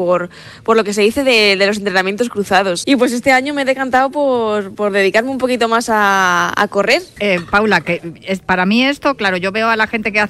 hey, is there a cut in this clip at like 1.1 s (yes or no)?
no